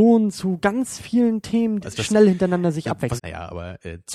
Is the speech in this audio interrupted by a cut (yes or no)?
yes